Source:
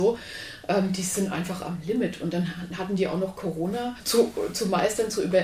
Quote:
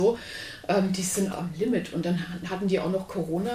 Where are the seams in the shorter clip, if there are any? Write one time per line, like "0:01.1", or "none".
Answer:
0:01.3